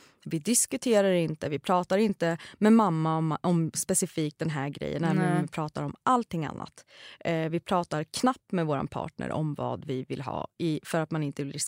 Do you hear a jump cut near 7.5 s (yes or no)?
no